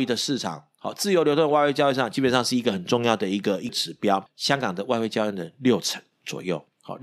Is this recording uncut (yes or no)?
no